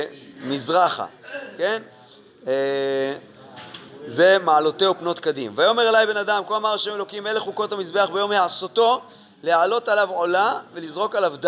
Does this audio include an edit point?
no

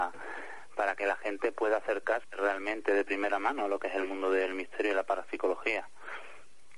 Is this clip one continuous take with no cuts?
yes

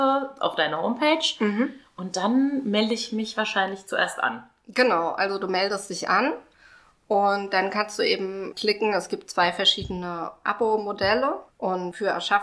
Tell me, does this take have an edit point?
yes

